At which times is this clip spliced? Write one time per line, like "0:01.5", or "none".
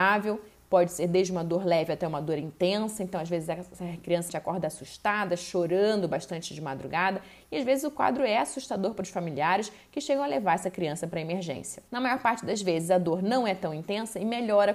0:04.3
0:11.9